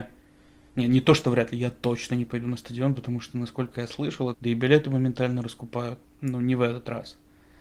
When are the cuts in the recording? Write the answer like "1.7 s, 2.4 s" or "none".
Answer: 4.3 s, 6.0 s